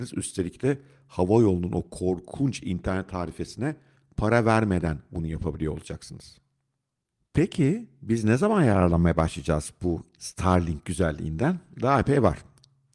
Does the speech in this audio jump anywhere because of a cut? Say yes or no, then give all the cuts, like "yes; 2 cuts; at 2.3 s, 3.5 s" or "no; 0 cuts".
no; 0 cuts